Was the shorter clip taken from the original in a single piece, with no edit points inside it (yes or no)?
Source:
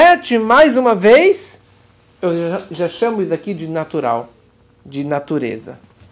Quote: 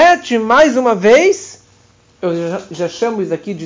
yes